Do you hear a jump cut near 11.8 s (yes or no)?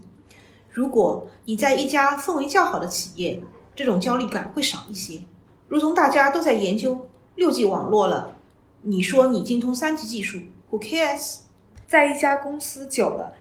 yes